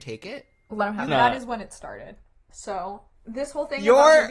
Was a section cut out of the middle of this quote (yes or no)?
yes